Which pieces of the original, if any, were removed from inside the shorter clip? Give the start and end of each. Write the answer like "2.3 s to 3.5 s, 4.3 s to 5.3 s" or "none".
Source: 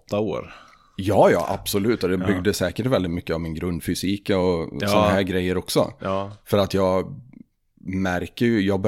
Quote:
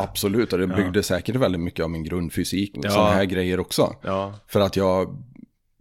4.2 s to 4.7 s

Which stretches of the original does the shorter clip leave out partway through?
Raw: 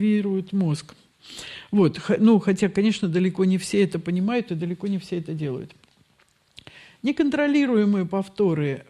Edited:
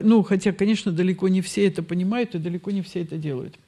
none

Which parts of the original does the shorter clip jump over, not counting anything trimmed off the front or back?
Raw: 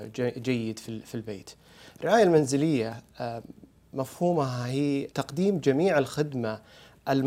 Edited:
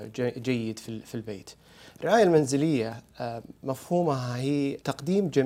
3.6 s to 3.9 s

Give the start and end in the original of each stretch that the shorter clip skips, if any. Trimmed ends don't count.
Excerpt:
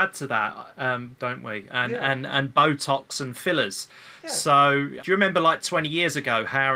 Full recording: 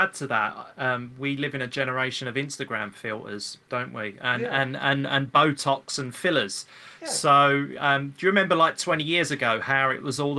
1.1 s to 3.6 s, 4.8 s to 5.1 s, 7.8 s to 8.2 s

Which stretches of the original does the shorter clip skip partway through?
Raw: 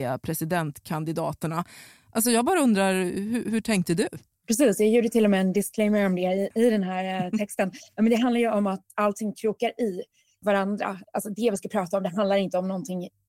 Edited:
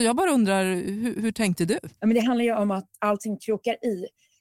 4.3 s to 7.9 s

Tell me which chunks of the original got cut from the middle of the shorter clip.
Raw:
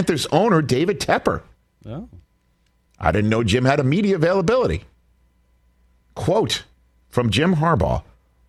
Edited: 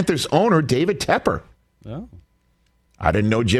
none

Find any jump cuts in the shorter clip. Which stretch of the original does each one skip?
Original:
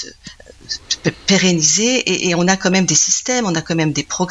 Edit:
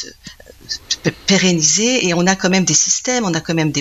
2.0 s to 2.2 s

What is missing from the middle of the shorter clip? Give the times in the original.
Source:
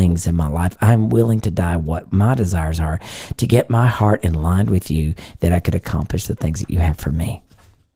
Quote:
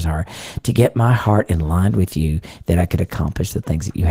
none

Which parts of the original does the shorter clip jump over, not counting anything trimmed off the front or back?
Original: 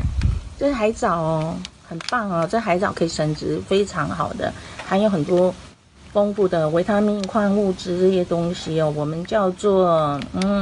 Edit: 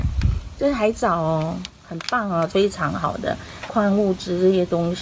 2.5 s to 3.7 s, 4.8 s to 7.3 s

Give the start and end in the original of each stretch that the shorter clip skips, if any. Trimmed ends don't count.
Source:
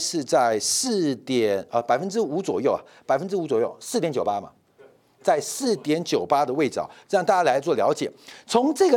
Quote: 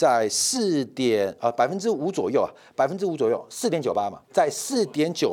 4.5 s to 5.1 s

